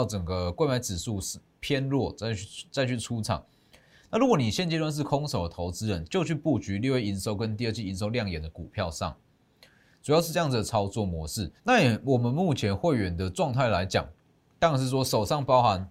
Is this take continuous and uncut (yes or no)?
no